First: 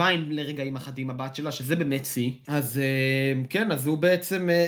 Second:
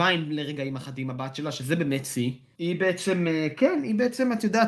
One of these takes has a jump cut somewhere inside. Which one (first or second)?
first